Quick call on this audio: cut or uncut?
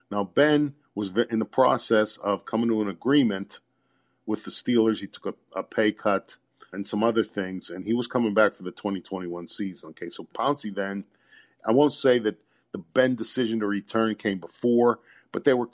cut